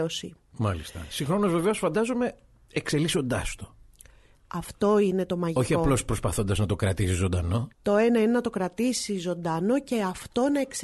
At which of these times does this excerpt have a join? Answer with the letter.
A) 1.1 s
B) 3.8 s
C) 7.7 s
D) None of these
C